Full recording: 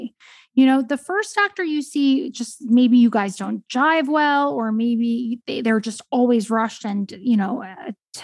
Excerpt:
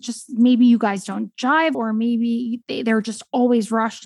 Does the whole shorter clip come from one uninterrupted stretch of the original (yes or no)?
no